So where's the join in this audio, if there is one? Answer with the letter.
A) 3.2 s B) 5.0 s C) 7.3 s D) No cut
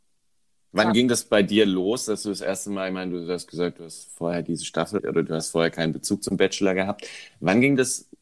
B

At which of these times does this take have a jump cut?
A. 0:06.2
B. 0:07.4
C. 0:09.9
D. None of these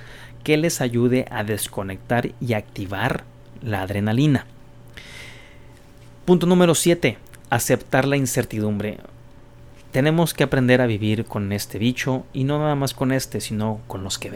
D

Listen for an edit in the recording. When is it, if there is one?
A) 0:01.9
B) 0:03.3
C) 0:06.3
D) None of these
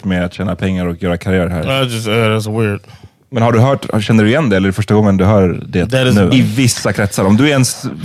C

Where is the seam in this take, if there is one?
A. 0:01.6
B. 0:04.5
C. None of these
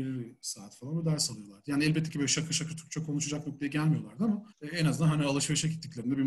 B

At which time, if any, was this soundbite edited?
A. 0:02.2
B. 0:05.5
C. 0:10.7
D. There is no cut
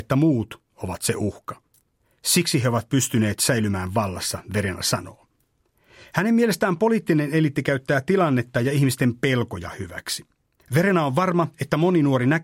D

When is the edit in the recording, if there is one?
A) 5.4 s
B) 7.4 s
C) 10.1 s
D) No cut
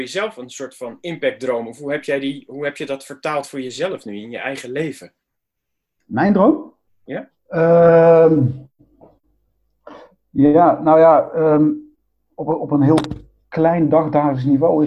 B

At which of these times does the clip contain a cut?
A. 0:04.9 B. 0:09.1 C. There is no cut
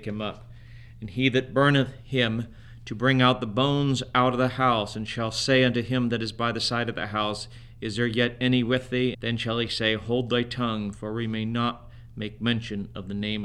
B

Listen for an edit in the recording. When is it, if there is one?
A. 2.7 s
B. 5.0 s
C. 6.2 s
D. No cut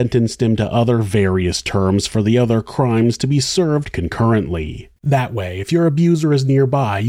B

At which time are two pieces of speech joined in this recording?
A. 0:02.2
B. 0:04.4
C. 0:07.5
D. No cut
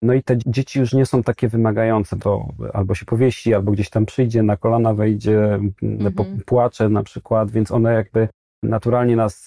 A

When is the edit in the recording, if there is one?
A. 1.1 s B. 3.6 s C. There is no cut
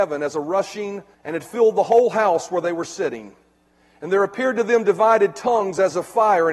A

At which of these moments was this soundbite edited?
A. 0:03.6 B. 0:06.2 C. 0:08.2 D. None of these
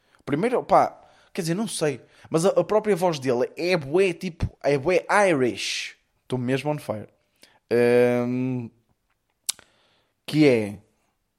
B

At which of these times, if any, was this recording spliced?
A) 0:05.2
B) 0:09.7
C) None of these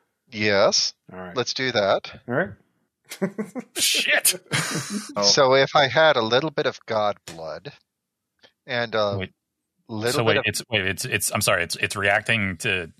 A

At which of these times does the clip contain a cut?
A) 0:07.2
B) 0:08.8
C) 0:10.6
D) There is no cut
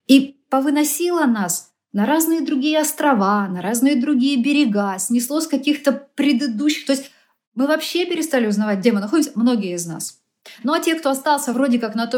D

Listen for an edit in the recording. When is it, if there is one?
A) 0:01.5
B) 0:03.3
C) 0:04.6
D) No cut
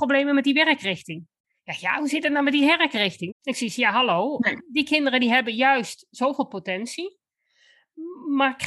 B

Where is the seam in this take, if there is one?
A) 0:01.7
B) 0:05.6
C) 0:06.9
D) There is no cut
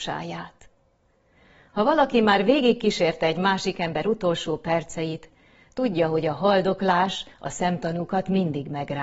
D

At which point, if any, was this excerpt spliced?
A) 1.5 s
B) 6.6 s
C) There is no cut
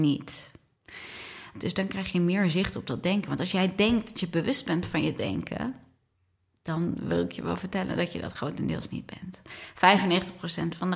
A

